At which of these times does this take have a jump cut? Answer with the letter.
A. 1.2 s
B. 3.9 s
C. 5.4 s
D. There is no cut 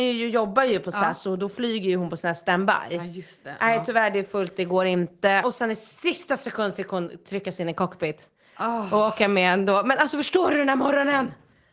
C